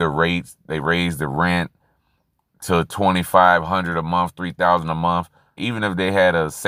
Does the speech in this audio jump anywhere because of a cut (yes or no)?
yes